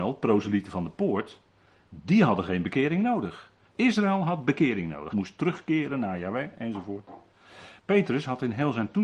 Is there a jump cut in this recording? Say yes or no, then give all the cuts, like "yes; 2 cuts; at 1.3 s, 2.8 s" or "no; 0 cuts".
yes; 3 cuts; at 3.7 s, 5.1 s, 7.8 s